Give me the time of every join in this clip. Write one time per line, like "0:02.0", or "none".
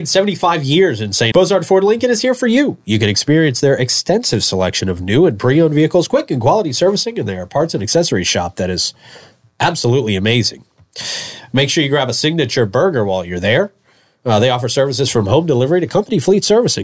0:01.3